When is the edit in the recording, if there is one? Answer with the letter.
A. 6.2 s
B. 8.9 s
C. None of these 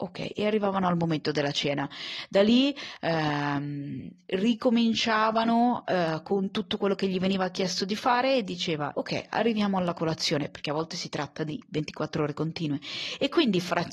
B